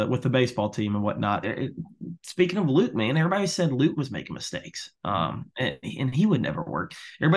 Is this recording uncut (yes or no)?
no